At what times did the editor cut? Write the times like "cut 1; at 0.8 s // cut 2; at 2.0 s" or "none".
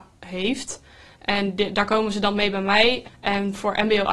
cut 1; at 3.0 s